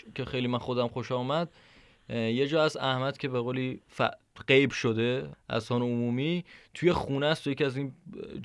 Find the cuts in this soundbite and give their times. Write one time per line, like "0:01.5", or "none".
0:05.3

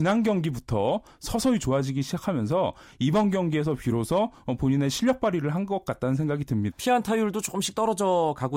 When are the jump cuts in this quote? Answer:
0:06.7

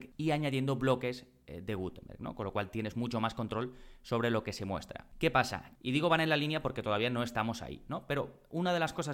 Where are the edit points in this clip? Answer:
0:05.7

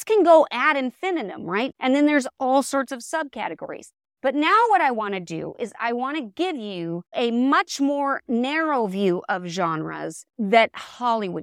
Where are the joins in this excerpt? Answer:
0:01.7

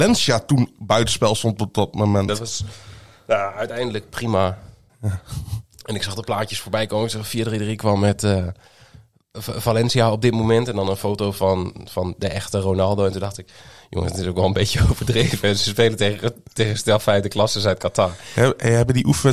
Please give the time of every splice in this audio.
0:02.3
0:04.9

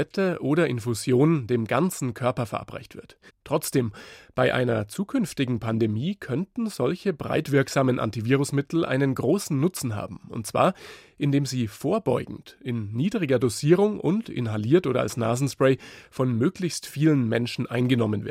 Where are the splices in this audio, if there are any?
0:03.3

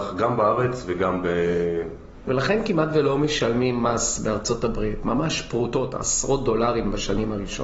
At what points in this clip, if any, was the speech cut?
0:02.3

